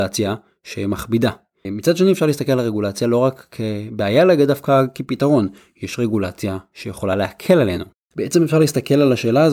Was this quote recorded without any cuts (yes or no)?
no